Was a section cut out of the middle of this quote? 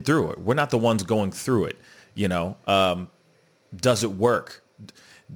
no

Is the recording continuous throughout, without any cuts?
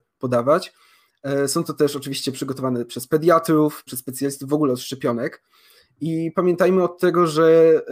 no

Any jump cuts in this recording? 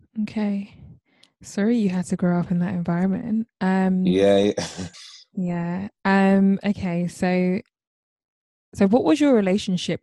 yes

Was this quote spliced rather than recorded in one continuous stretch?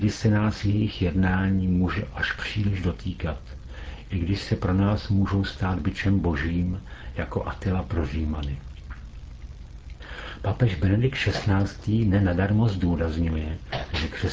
no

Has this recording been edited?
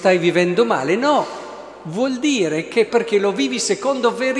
yes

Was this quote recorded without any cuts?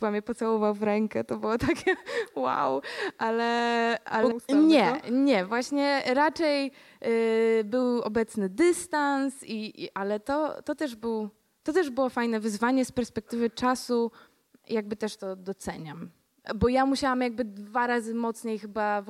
no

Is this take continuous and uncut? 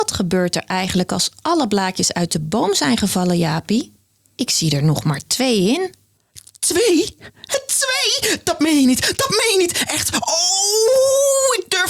yes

